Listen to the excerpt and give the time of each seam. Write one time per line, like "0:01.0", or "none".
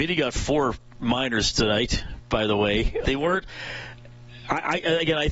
0:03.0